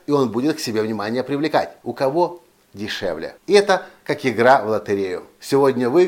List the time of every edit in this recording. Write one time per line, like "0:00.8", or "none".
0:01.8
0:03.4